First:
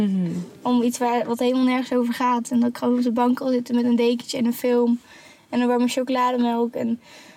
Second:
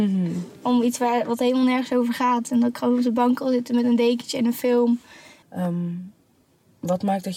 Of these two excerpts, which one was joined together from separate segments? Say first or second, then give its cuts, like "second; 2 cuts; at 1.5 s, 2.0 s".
second; 1 cut; at 5.4 s